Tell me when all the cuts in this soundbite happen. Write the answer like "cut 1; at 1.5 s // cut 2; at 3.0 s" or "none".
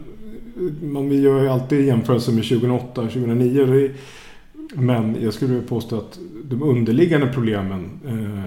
cut 1; at 4.7 s